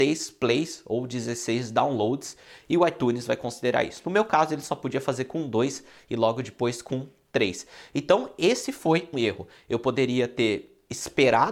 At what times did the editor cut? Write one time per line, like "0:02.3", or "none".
0:09.1